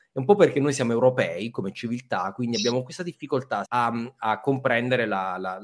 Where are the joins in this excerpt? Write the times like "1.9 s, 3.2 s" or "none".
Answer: 3.6 s

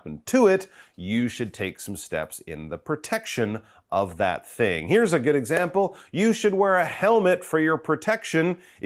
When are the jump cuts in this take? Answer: none

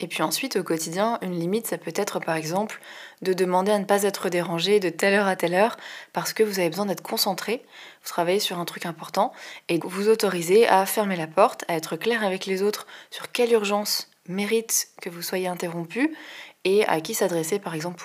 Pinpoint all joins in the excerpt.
9.8 s

